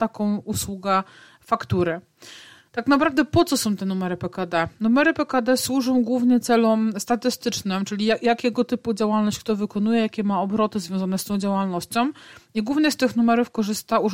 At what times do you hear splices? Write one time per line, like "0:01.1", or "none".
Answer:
none